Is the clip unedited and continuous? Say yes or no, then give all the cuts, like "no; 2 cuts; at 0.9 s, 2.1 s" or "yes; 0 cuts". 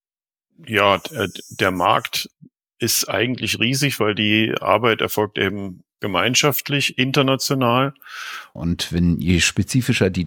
no; 1 cut; at 8.5 s